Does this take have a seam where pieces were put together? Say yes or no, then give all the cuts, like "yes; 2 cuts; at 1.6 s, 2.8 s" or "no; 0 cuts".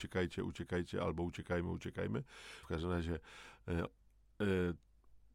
yes; 2 cuts; at 2.6 s, 3.9 s